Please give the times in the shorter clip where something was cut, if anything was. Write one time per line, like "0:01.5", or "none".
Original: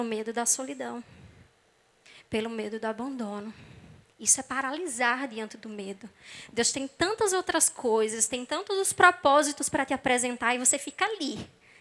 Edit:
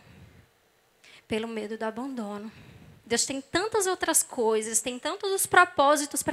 0:03.0